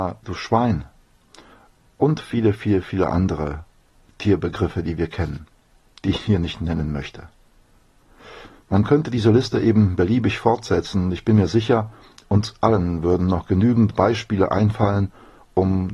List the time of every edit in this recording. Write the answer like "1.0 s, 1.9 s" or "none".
none